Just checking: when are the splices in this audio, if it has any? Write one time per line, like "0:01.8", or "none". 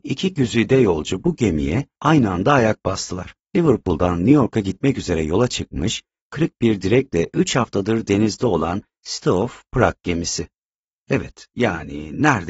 0:03.5
0:11.0